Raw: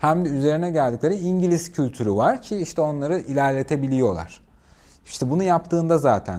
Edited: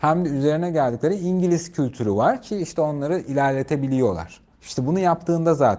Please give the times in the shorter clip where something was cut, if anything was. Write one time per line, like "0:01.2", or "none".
0:04.5